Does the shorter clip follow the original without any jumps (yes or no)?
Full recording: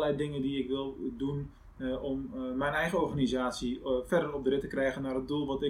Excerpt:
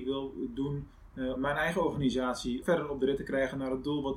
no